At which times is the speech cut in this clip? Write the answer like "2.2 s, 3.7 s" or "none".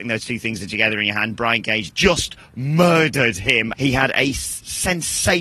1.9 s, 3.7 s